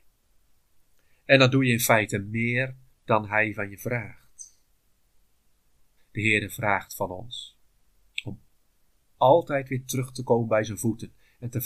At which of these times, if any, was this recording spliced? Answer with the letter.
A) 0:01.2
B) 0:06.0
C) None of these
B